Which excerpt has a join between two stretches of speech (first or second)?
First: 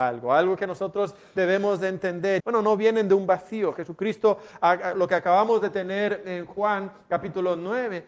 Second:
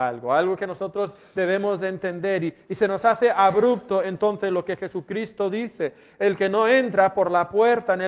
first